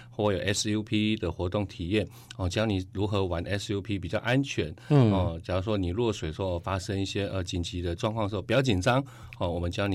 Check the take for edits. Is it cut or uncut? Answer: uncut